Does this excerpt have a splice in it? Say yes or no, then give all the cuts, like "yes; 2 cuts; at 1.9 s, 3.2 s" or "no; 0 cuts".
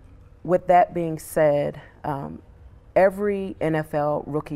no; 0 cuts